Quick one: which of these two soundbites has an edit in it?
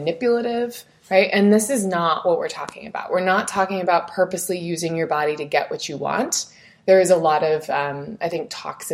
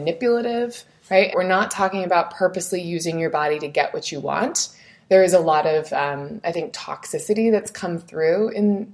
second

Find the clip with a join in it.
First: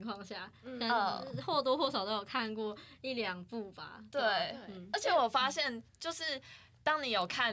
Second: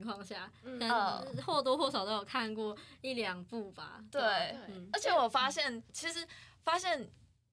second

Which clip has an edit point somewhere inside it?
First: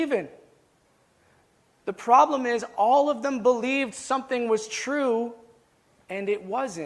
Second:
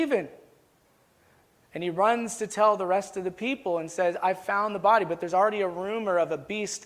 second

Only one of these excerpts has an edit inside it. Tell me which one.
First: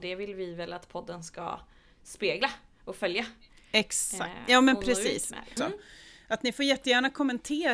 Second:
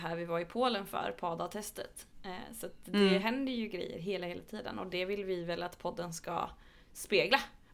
first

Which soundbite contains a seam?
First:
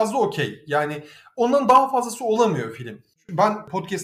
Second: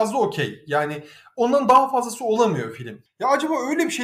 second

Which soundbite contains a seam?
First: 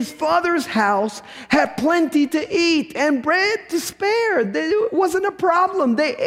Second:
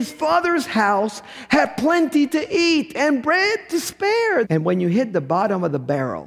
second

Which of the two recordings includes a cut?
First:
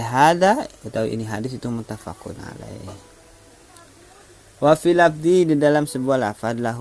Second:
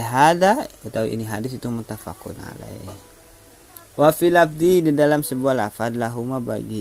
second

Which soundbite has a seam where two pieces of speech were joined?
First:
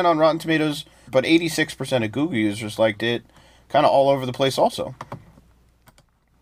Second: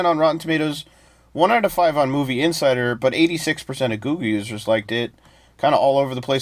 first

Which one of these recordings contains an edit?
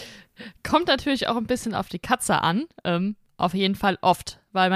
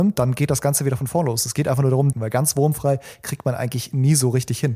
second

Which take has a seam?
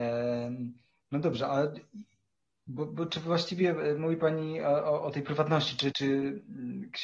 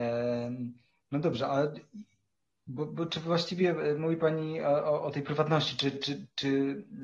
first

